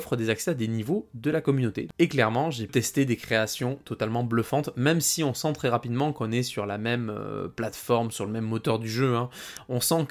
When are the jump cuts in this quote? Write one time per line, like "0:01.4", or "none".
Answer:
none